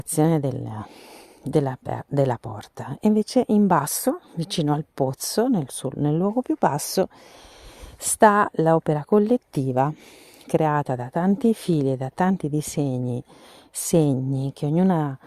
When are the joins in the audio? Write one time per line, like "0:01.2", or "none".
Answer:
none